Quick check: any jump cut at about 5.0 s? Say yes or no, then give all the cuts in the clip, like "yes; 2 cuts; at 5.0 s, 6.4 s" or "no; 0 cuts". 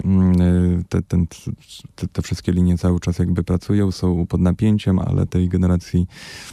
yes; 1 cut; at 5.0 s